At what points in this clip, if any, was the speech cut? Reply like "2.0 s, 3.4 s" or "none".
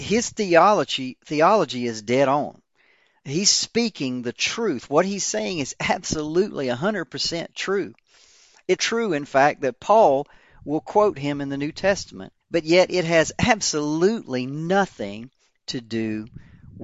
8.8 s, 12.4 s

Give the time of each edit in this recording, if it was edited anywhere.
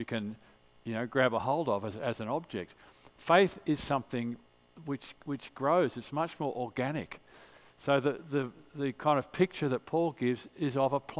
none

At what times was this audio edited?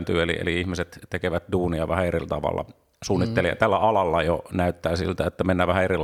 none

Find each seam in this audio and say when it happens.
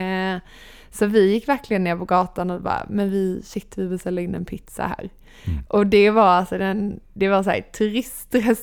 none

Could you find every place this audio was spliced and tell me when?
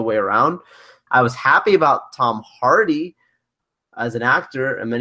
1.1 s

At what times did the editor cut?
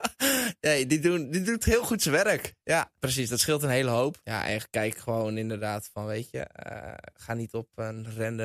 none

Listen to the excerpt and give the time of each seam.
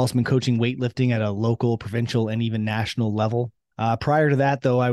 3.7 s

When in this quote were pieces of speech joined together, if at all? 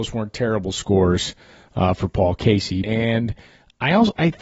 2.8 s

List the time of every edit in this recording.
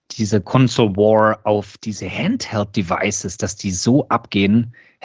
none

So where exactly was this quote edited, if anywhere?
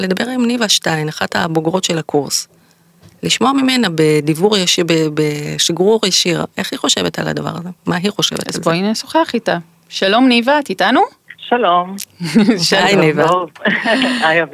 none

